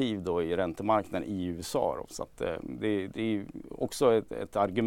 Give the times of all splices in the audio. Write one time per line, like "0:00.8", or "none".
none